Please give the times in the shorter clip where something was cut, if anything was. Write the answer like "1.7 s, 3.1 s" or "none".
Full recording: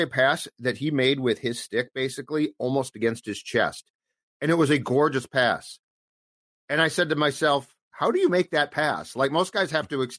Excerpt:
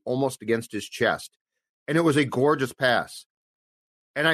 none